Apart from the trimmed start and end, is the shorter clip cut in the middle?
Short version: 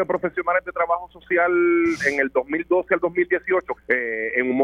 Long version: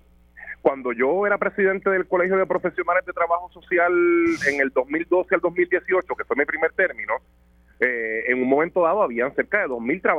yes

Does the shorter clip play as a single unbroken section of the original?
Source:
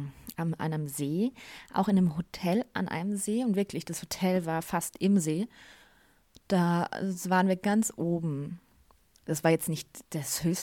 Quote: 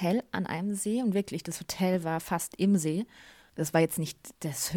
no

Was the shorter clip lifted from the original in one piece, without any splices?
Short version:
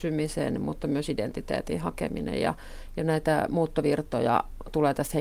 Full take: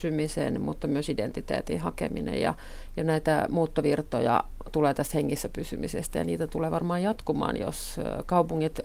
yes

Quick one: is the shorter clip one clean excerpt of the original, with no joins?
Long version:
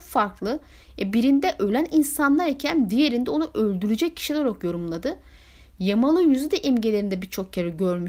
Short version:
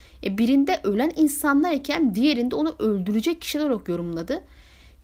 yes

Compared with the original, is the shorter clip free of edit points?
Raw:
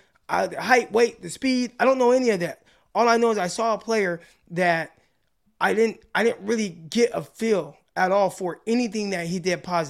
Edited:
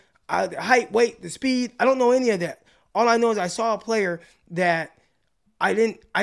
yes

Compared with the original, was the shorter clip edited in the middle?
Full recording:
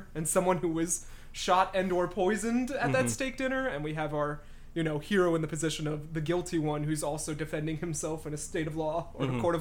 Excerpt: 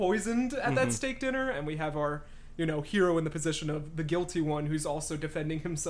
no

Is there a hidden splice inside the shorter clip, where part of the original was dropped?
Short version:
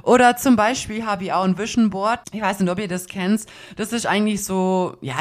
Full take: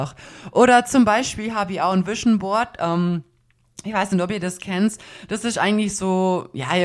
yes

